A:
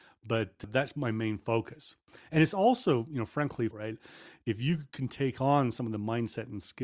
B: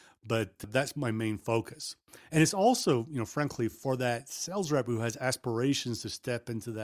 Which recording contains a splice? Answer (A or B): A